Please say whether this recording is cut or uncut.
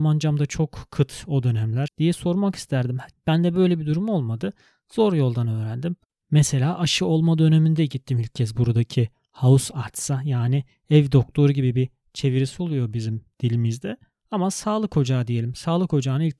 cut